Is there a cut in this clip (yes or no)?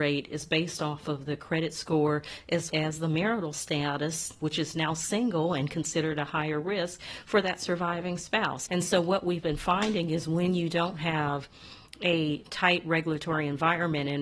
yes